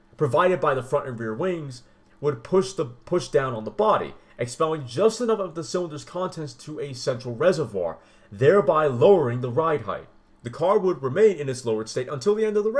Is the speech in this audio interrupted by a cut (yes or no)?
no